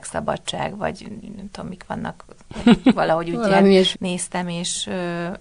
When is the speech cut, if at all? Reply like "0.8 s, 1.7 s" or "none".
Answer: 3.9 s